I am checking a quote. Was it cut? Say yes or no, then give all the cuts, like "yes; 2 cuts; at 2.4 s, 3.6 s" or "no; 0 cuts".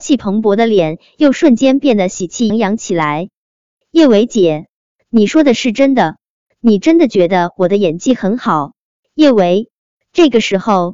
yes; 1 cut; at 2.5 s